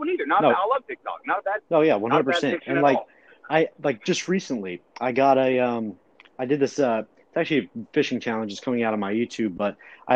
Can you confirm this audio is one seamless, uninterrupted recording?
yes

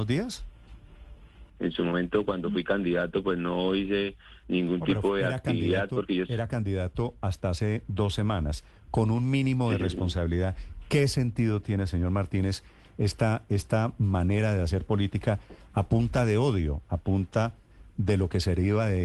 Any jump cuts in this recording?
yes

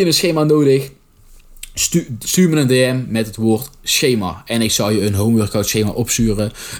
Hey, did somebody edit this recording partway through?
no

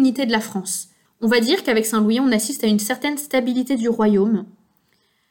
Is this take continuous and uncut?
no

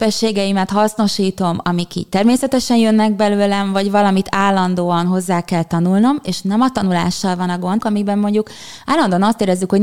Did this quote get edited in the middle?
yes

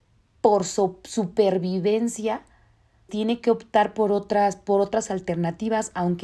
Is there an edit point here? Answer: yes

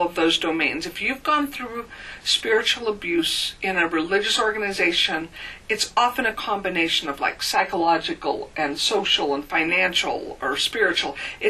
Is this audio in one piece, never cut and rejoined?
yes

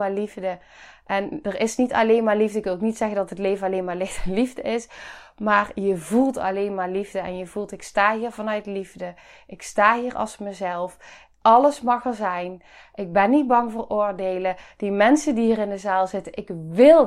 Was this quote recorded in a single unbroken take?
yes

